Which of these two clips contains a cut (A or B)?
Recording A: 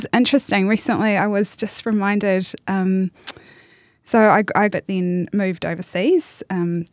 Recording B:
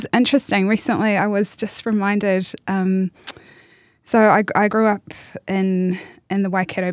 A